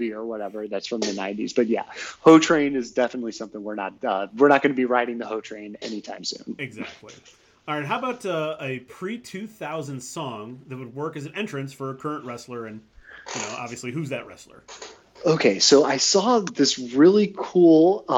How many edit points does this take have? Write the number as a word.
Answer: zero